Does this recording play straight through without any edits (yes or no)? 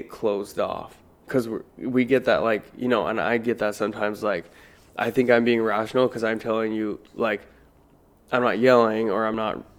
yes